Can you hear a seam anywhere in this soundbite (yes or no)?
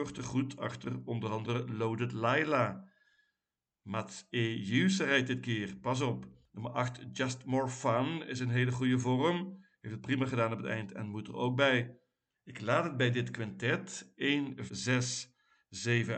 yes